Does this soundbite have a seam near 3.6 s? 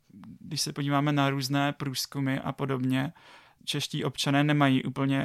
yes; 1 cut; at 3.6 s

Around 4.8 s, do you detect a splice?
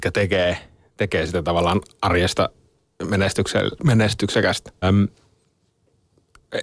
yes; 1 cut; at 4.8 s

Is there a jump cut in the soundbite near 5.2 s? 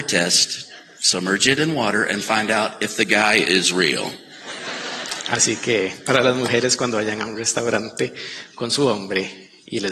no; 0 cuts

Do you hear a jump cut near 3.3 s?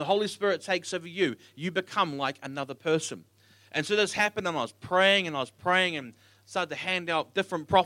no; 0 cuts

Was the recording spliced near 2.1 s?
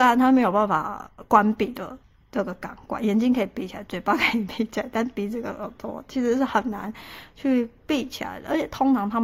no; 0 cuts

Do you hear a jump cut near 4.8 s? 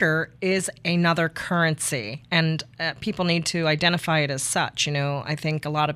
no; 0 cuts

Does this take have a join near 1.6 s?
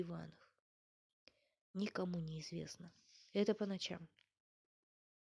yes; 1 cut; at 1.6 s

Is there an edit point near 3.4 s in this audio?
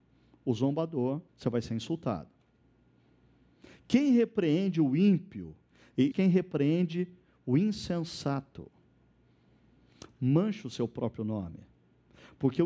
no; 2 cuts; at 1.3 s, 6.1 s

